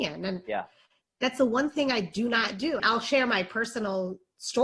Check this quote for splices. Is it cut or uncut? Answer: cut